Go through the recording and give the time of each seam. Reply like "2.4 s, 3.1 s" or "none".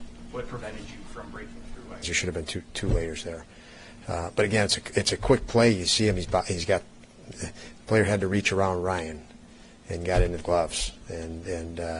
2.0 s